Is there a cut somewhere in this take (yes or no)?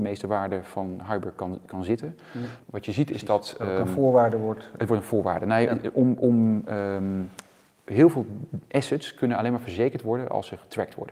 yes